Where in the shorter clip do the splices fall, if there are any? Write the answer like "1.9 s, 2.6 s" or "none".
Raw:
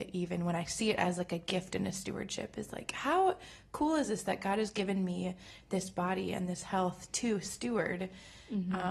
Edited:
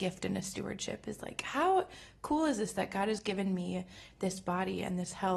none